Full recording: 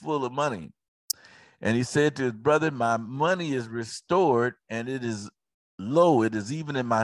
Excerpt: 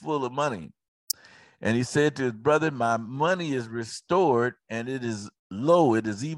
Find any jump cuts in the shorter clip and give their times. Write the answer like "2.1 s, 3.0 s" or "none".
5.4 s